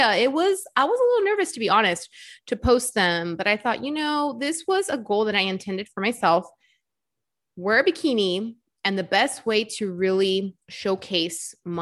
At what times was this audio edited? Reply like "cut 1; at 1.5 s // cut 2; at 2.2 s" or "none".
none